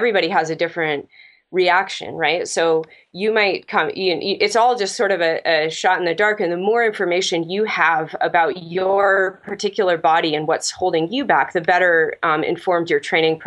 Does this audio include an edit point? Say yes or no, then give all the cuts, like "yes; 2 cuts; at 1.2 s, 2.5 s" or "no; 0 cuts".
no; 0 cuts